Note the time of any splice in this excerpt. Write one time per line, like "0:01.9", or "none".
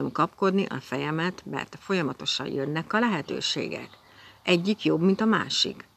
none